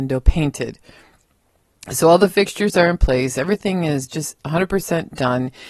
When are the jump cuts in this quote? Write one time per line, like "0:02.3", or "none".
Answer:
none

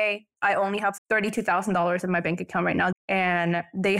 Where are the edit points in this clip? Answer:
0:01.0
0:02.9

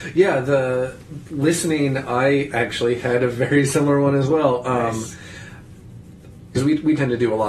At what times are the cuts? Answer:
0:06.6

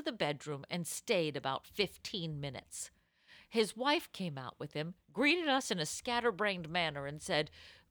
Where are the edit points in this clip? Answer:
none

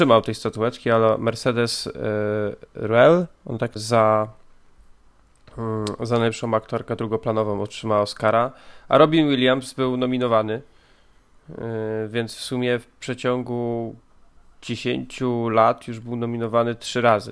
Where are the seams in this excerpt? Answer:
0:03.8

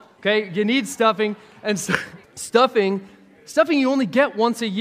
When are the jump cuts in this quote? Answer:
0:02.2

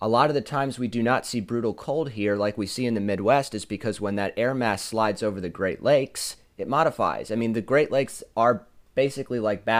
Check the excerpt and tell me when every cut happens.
none

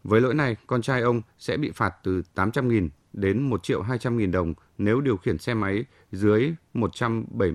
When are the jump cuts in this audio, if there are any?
none

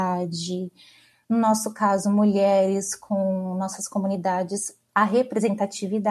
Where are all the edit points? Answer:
none

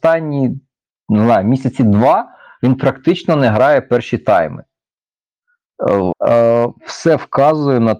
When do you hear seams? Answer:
0:06.1

